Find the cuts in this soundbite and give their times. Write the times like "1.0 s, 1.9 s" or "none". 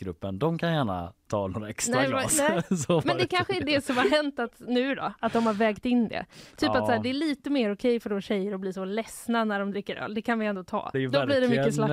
10.9 s